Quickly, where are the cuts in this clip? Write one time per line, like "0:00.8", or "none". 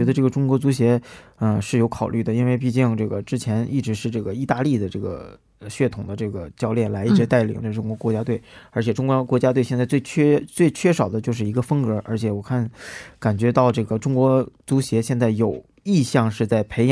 0:14.6